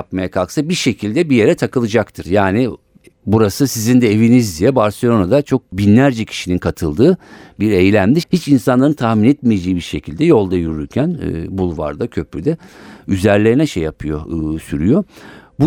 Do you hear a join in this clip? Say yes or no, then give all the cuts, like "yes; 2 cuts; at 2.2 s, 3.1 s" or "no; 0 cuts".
yes; 2 cuts; at 2.2 s, 8.2 s